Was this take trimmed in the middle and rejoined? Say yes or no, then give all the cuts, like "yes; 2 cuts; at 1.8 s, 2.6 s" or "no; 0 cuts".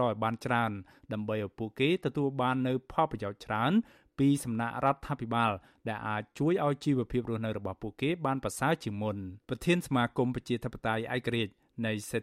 yes; 1 cut; at 9.4 s